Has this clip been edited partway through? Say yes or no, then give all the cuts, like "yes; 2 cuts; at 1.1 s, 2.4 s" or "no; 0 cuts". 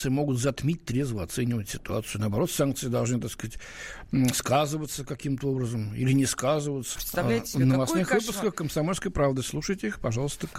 yes; 1 cut; at 7.0 s